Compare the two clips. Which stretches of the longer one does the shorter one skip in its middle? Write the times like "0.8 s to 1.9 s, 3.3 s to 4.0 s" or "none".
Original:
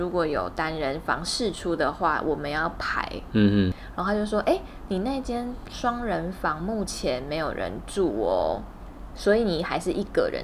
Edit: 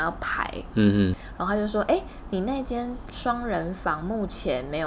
none